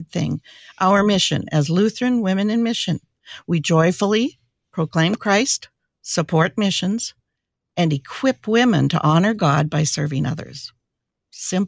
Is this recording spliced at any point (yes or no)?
no